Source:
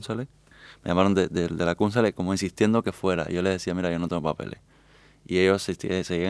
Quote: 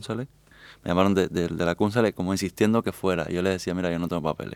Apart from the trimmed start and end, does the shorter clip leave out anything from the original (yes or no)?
no